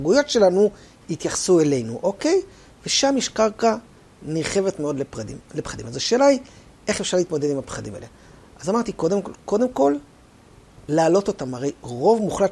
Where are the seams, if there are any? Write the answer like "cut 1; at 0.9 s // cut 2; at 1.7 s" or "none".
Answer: none